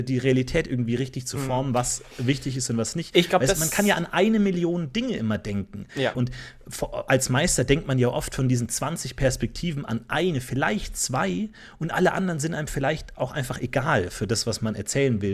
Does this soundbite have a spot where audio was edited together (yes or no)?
yes